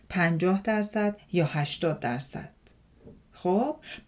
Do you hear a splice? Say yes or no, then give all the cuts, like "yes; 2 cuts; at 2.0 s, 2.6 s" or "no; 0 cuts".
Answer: no; 0 cuts